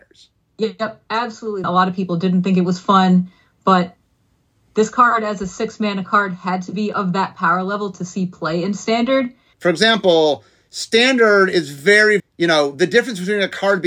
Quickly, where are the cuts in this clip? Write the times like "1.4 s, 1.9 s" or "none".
1.6 s, 9.5 s, 12.2 s

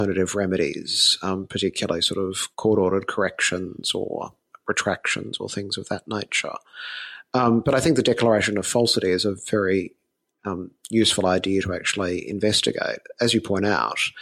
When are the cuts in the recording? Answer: 2.5 s

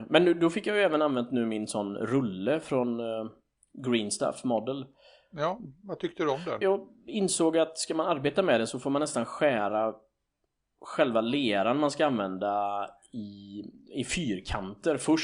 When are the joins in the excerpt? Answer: 6.6 s

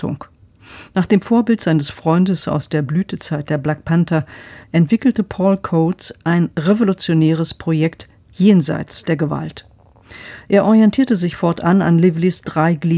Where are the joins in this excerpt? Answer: 4.6 s

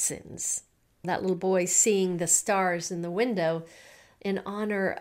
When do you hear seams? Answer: 1.0 s

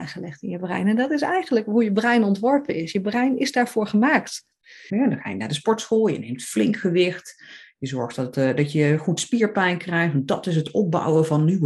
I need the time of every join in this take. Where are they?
4.9 s

